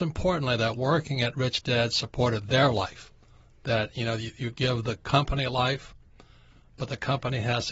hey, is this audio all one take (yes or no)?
yes